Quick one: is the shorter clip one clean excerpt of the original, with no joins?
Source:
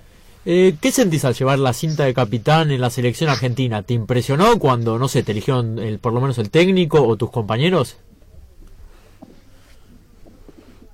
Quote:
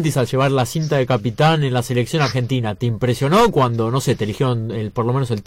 yes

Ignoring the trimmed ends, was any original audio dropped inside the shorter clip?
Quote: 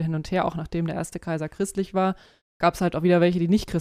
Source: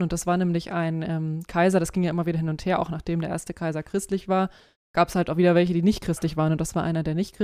no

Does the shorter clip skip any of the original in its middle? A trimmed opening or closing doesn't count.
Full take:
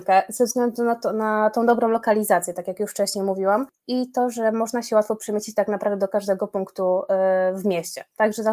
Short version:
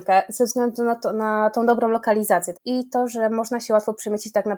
yes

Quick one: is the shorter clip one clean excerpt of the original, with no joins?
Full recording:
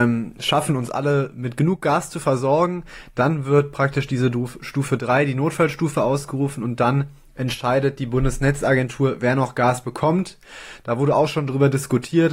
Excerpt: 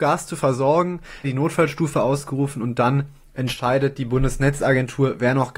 no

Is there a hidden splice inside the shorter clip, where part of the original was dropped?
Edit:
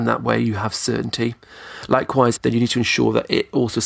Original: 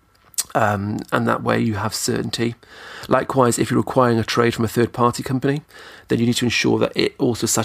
yes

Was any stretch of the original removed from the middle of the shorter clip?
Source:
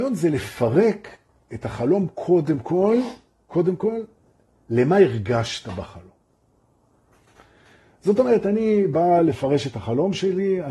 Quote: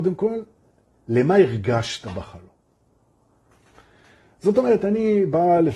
no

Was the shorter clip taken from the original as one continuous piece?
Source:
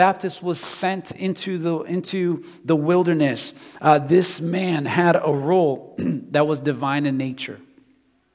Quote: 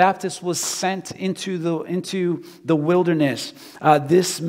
yes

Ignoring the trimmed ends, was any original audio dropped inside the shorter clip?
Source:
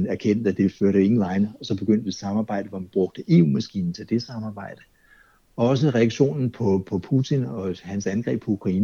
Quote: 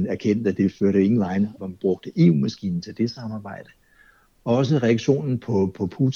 yes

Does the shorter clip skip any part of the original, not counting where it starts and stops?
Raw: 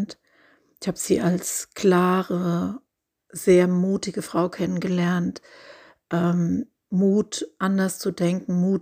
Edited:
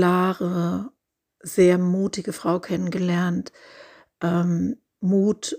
no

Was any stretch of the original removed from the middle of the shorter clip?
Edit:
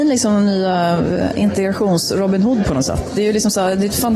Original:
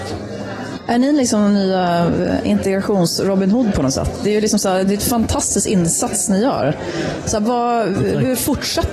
no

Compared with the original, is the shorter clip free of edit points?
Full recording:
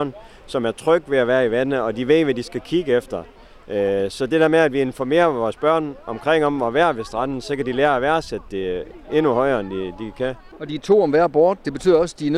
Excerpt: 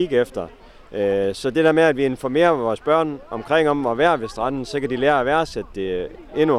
yes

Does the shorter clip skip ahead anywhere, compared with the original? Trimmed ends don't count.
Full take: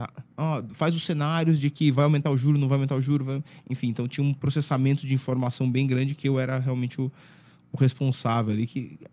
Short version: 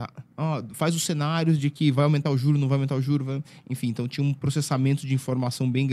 no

